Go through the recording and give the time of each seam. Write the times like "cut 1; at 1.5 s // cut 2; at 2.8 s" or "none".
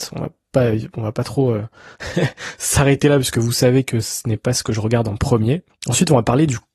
none